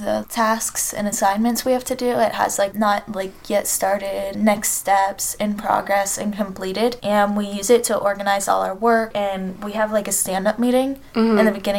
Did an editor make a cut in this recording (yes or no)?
yes